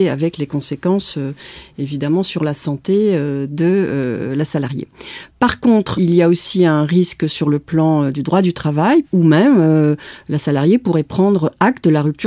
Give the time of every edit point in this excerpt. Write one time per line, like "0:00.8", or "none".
0:05.9
0:09.0